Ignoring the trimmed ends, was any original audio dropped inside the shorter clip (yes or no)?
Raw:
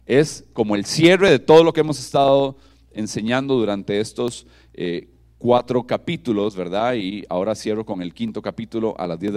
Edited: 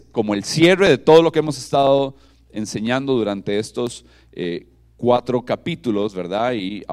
no